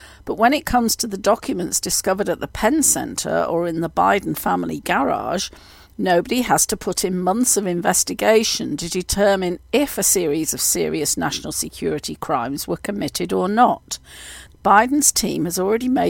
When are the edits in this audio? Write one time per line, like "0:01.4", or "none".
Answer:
0:14.5

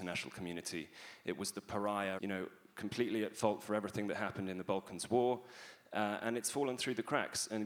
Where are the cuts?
0:02.2

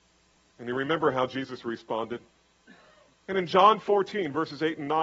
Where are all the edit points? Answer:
0:03.1

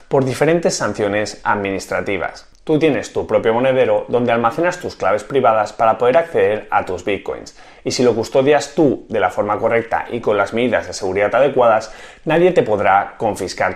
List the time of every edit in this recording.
0:02.5

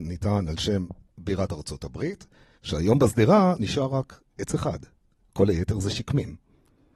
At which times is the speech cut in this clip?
0:02.6

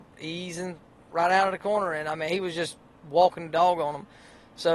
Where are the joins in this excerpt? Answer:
none

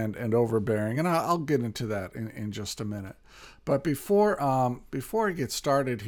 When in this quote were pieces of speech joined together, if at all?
none

